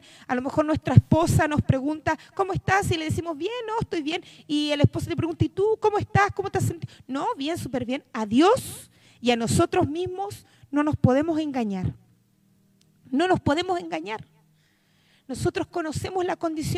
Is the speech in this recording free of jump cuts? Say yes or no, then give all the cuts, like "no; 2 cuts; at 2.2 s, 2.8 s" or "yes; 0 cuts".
yes; 0 cuts